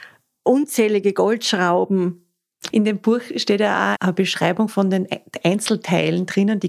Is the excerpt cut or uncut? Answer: cut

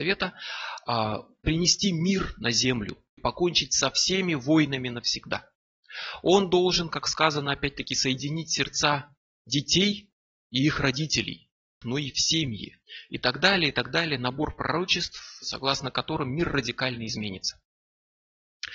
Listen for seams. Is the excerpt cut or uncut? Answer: cut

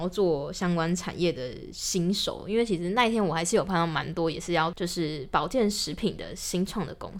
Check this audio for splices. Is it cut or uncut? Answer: uncut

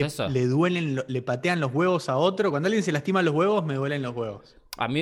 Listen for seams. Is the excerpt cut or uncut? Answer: uncut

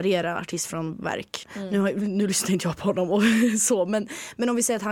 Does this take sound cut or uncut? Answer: cut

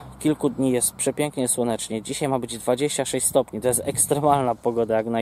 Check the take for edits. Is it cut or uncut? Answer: uncut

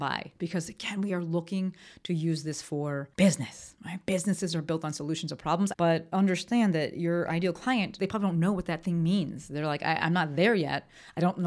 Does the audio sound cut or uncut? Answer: cut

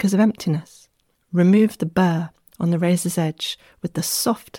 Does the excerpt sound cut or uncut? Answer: cut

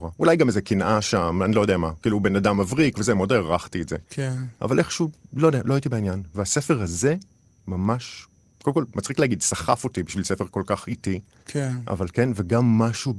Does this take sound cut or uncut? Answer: uncut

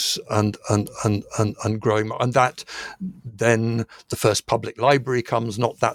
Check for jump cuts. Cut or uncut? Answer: uncut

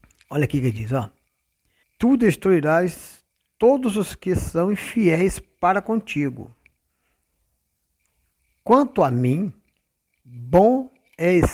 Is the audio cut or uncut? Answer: cut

